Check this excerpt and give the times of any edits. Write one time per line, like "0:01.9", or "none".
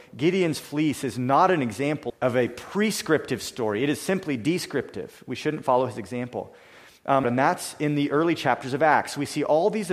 0:02.1
0:07.2